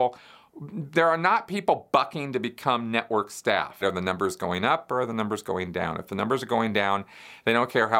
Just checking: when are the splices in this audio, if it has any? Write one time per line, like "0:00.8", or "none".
0:03.8